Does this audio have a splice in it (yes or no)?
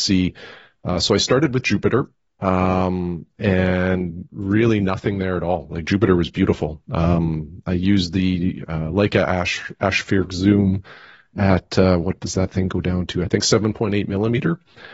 no